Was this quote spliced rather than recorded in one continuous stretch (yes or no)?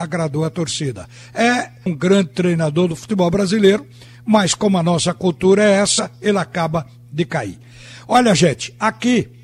yes